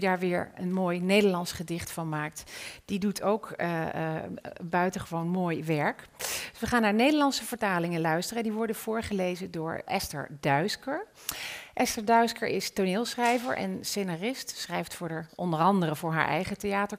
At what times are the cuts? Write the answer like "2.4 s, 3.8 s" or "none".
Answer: 9.9 s